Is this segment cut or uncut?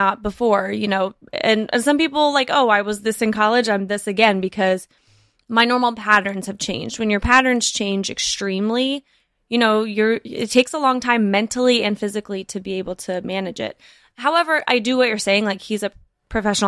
uncut